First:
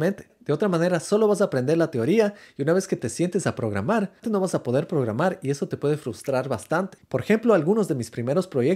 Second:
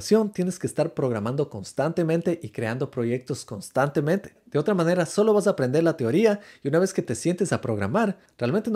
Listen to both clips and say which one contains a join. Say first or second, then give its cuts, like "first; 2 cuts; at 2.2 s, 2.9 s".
first; 2 cuts; at 4.2 s, 7.0 s